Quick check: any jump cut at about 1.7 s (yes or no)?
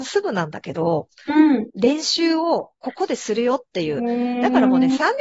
yes